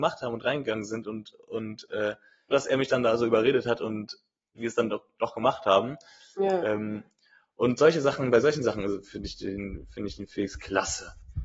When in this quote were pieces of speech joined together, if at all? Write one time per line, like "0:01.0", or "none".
0:02.5